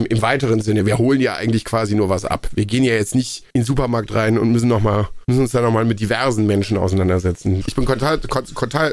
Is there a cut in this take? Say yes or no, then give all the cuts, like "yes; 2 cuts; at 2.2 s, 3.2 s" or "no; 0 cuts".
yes; 1 cut; at 7.6 s